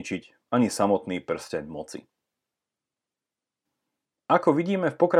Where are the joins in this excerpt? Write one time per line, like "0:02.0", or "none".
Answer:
0:04.1